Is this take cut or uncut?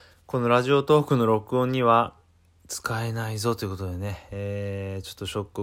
uncut